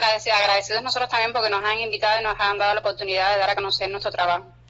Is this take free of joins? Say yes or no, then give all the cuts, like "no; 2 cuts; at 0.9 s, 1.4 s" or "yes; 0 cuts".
yes; 0 cuts